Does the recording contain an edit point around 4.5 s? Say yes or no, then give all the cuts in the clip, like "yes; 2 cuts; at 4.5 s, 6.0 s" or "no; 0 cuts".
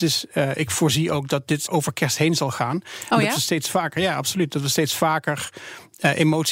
no; 1 cut; at 1.7 s